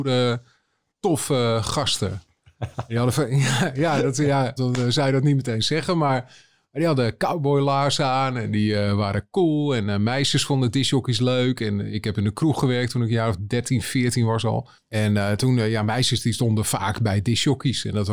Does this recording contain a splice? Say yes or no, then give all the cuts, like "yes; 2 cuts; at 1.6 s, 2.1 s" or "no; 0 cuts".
yes; 1 cut; at 4.6 s